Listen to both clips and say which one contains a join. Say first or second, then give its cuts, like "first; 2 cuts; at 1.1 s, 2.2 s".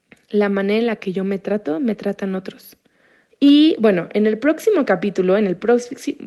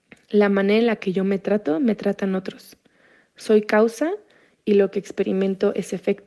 first; 1 cut; at 3.3 s